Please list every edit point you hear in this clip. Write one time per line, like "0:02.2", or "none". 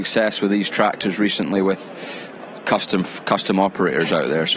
none